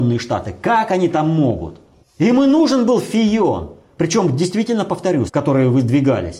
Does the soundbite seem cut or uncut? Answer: cut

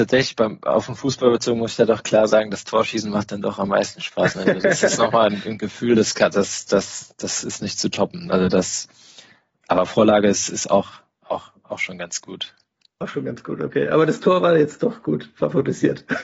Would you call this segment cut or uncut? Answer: uncut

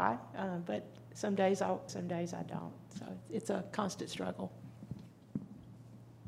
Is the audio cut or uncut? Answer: cut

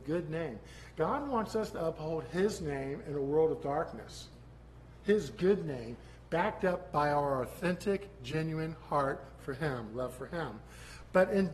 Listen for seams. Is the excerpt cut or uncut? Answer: uncut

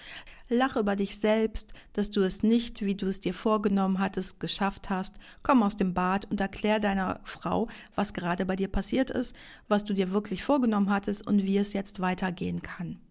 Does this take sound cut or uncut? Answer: uncut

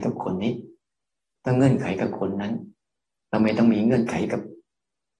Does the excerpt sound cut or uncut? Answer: uncut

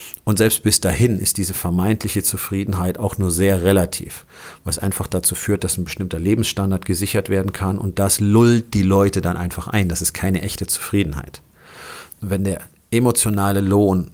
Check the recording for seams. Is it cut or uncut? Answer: cut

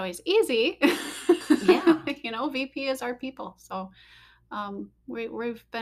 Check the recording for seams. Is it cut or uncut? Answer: cut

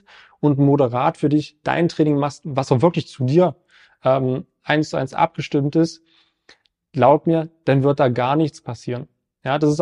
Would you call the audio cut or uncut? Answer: uncut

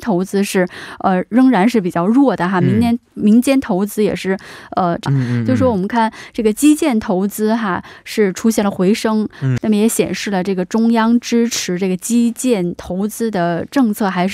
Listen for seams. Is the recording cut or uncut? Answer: cut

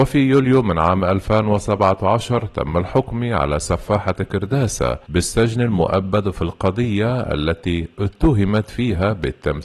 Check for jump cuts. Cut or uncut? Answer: cut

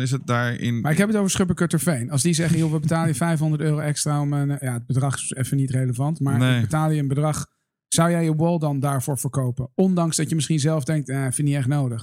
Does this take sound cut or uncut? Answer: uncut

